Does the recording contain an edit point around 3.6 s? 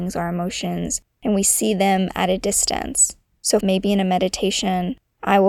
yes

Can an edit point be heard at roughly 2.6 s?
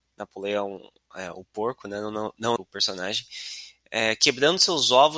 yes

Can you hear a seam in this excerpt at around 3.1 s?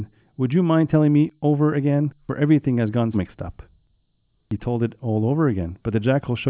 yes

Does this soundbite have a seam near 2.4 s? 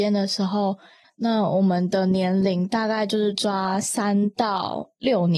no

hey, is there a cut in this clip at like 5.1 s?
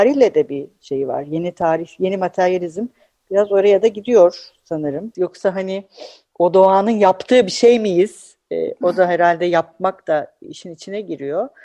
yes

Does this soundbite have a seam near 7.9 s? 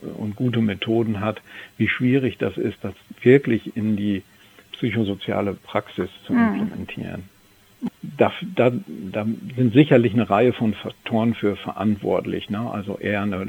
yes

